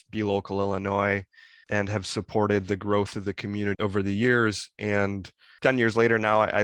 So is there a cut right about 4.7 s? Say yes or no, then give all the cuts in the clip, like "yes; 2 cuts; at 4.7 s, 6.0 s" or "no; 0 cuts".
no; 0 cuts